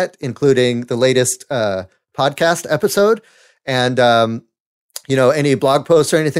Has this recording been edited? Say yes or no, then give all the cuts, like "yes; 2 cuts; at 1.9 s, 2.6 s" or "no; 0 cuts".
no; 0 cuts